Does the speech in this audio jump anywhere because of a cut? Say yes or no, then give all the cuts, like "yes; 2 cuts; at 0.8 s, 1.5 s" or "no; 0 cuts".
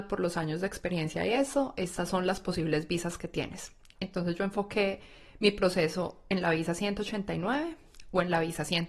no; 0 cuts